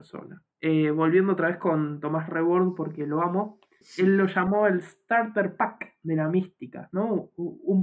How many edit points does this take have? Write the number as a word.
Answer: one